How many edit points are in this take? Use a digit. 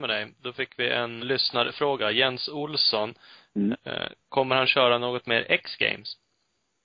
2